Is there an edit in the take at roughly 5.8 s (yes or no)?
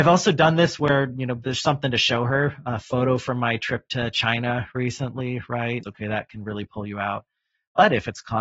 yes